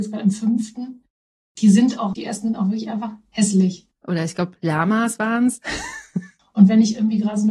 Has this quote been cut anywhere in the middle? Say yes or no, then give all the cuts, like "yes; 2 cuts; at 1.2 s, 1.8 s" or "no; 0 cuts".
yes; 3 cuts; at 2.1 s, 3.9 s, 6.4 s